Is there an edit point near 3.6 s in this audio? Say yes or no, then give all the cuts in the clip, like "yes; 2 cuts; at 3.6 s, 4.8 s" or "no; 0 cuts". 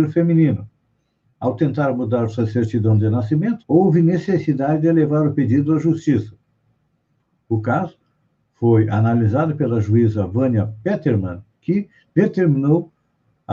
yes; 1 cut; at 3.6 s